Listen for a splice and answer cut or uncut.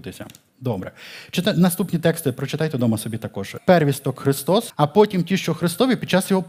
cut